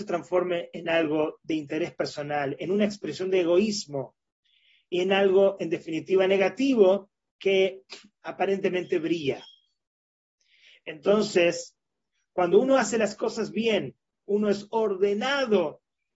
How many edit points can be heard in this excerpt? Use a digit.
1